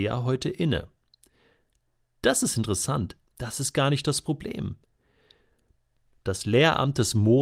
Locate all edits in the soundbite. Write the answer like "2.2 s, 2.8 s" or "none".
3.3 s